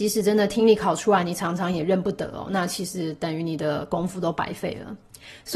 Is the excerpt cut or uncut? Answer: uncut